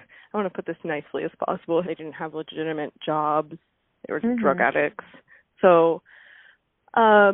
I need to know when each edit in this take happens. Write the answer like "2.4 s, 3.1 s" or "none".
1.8 s, 4.2 s